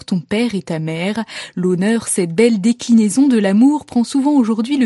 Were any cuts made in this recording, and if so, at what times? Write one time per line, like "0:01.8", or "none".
none

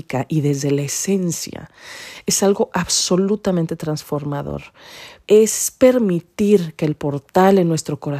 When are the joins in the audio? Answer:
0:05.2

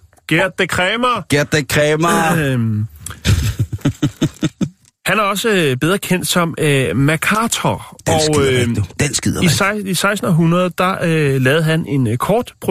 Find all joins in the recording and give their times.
none

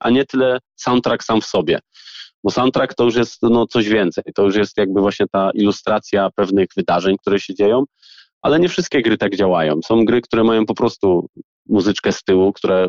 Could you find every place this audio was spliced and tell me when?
none

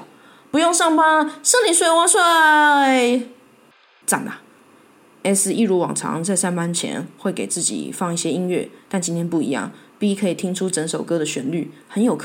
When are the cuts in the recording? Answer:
0:04.0
0:08.8

